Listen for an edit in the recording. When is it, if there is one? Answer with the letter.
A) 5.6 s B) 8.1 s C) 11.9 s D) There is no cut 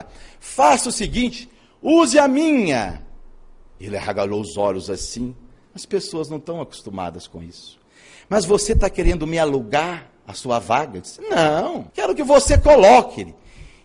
C